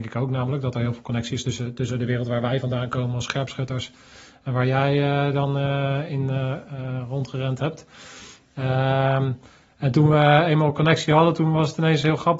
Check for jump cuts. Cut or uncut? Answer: uncut